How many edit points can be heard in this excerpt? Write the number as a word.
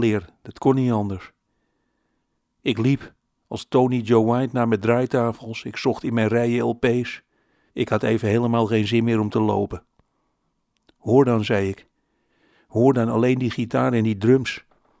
one